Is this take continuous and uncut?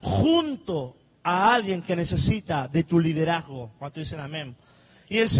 yes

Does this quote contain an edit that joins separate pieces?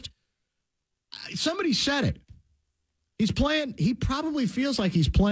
no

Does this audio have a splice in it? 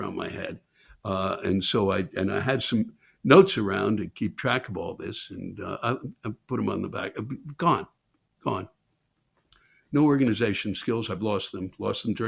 no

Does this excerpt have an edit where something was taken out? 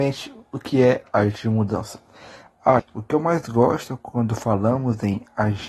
yes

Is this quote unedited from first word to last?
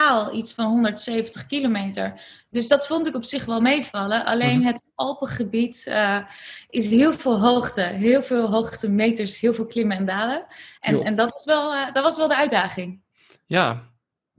yes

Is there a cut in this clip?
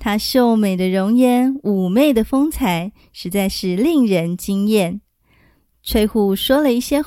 no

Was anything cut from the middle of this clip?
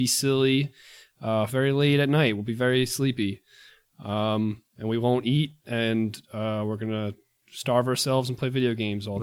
yes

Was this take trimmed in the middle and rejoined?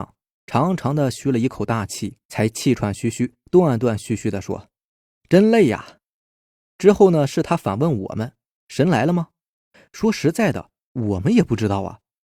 yes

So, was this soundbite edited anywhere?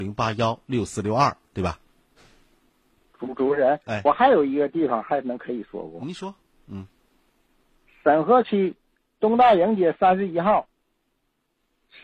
no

